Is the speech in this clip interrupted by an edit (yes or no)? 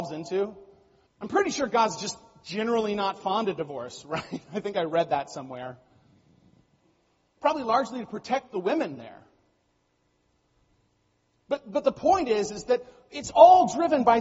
yes